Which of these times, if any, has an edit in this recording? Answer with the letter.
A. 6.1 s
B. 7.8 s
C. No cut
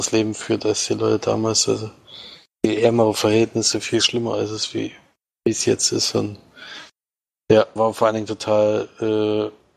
B